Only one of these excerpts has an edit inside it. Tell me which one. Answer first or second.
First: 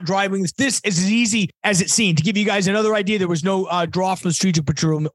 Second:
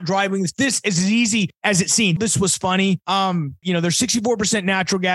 second